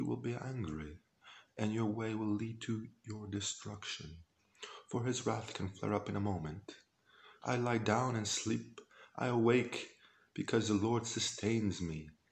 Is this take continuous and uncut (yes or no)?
no